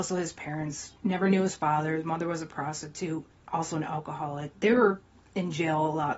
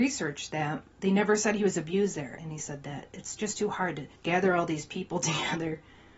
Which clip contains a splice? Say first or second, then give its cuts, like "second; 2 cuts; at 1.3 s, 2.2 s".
second; 2 cuts; at 2.4 s, 4.1 s